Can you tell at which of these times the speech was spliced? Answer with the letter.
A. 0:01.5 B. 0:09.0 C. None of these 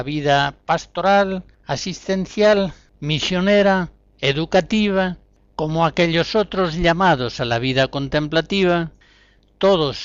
C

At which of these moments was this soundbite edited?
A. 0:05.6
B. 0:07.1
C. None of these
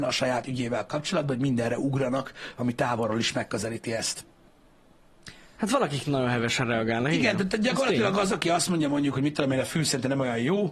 A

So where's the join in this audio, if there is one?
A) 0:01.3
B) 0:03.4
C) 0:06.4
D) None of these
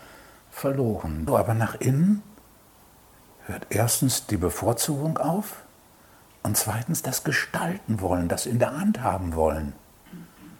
A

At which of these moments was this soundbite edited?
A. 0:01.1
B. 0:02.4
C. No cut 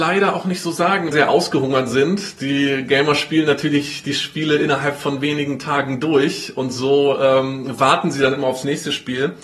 A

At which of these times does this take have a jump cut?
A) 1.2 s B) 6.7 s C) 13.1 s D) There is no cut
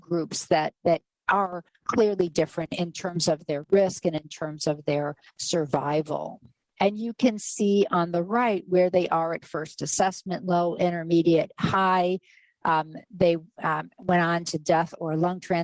B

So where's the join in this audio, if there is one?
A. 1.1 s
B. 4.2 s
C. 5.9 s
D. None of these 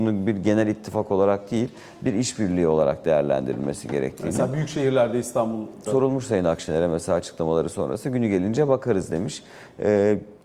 C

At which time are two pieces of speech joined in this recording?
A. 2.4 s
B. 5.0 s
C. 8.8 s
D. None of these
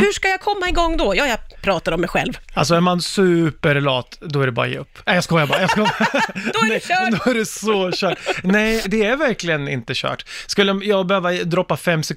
C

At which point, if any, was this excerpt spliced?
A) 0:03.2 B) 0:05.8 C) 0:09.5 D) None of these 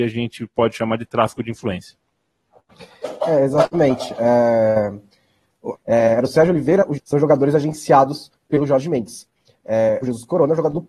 B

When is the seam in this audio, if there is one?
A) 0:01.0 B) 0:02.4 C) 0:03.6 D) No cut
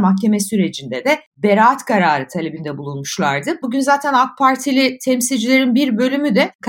C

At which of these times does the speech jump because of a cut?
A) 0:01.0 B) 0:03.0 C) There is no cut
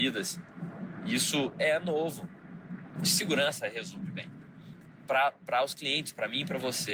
B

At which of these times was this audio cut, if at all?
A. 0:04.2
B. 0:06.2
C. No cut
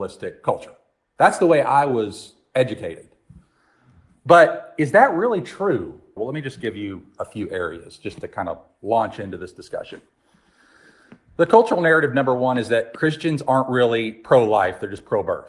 B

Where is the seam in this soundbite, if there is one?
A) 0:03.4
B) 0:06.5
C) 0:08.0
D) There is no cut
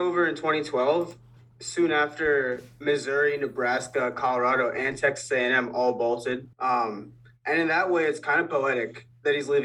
B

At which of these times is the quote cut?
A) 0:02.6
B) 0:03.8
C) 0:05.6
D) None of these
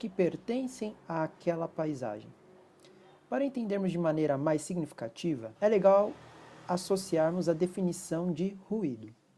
C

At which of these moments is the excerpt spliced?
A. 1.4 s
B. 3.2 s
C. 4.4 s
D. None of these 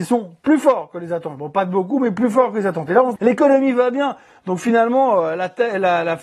B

